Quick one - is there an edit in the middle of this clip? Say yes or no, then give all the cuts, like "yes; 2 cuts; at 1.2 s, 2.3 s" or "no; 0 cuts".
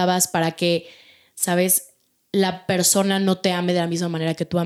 no; 0 cuts